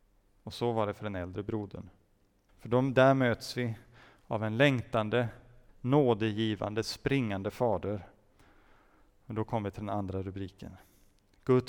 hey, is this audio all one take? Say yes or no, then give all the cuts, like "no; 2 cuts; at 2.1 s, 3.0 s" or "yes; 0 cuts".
no; 2 cuts; at 2.5 s, 5.7 s